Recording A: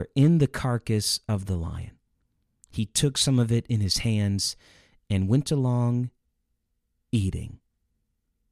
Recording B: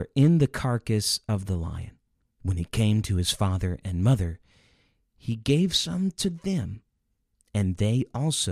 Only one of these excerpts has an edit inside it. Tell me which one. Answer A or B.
B